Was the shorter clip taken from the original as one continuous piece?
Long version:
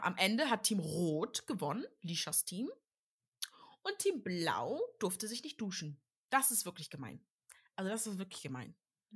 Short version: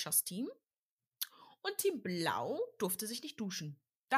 yes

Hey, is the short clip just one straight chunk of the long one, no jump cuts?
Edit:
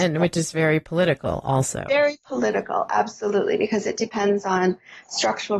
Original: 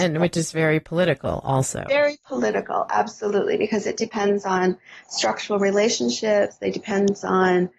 yes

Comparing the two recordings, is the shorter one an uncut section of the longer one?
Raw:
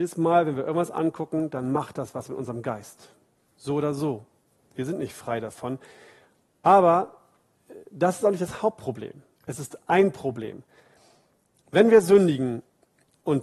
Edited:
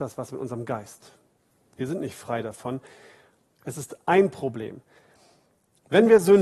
no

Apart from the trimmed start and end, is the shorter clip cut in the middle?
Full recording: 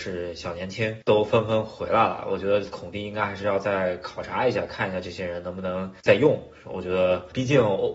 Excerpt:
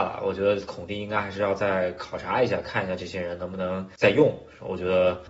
no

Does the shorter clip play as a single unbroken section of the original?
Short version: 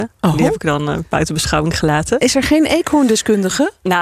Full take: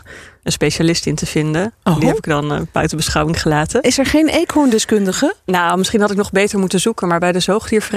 yes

